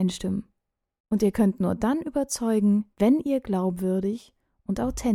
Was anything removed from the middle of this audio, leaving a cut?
yes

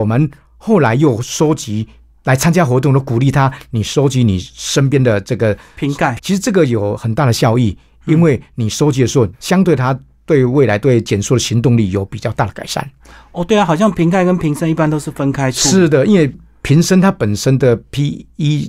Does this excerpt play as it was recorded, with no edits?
no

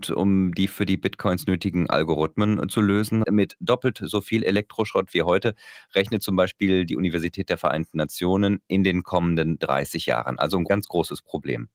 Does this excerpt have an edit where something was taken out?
yes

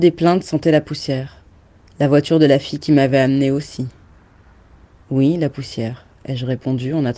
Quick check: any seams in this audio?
yes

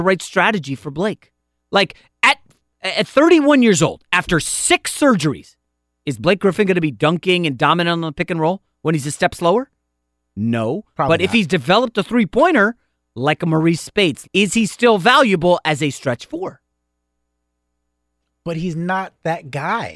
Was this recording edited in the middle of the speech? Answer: yes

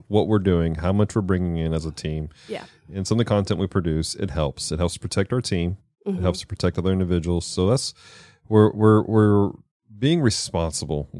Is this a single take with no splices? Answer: yes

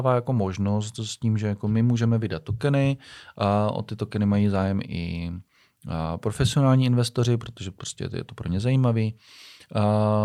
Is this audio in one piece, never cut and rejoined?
no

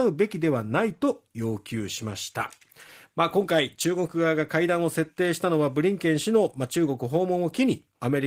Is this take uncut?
yes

